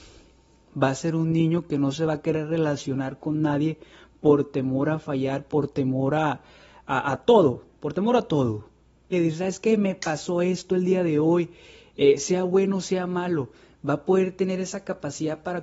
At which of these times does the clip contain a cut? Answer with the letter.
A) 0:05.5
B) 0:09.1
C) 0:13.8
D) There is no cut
B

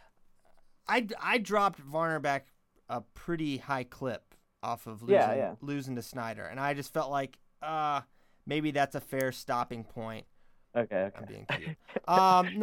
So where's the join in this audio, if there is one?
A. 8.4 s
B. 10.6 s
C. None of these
B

